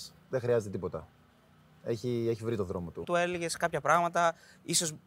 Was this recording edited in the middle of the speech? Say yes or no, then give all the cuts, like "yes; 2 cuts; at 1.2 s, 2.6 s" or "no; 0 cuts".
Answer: yes; 1 cut; at 3.0 s